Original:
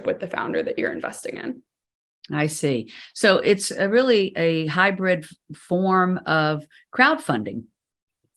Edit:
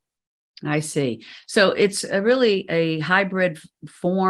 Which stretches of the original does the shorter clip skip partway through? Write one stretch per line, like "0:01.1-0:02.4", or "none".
none